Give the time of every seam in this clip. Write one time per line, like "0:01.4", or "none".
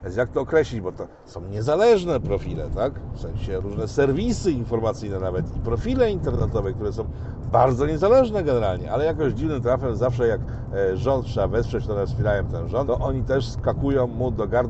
0:12.8